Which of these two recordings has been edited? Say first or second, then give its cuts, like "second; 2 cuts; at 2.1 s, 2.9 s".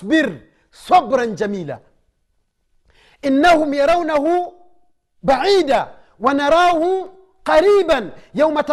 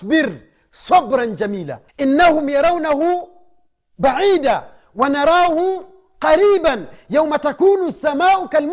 second; 1 cut; at 1.9 s